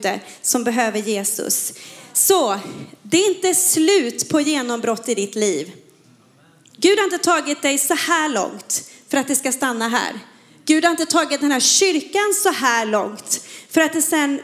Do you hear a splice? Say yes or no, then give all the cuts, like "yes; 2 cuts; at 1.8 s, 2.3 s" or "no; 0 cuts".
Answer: no; 0 cuts